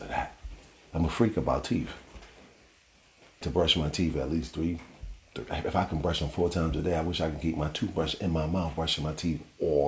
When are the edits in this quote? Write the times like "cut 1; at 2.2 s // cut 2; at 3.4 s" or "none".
cut 1; at 3.4 s

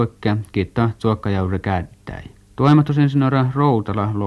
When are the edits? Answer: cut 1; at 2.4 s

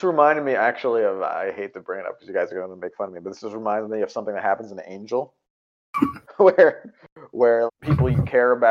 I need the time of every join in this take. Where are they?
cut 1; at 7.7 s

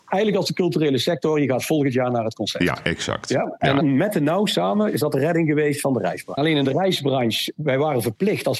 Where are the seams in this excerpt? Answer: cut 1; at 3.8 s // cut 2; at 6.4 s

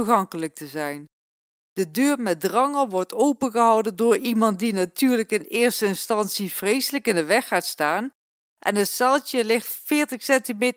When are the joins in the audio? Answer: none

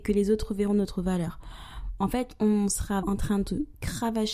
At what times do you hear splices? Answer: cut 1; at 3.0 s

